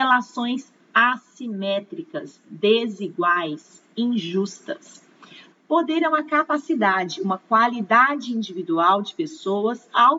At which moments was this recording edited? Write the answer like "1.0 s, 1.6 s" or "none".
5.5 s